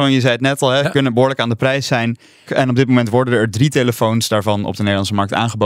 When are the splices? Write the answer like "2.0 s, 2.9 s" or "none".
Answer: 2.5 s